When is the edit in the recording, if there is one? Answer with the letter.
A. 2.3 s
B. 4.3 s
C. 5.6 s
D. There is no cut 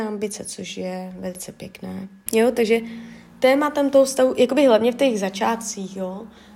A